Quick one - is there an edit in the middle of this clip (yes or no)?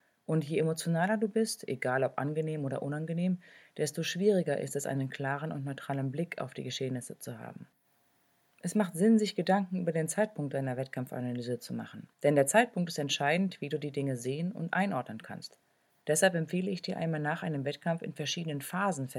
yes